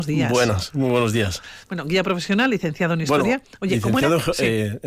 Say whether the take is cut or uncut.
uncut